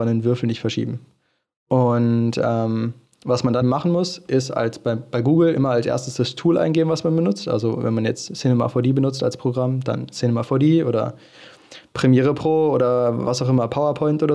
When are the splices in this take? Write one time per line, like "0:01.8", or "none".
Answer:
0:03.6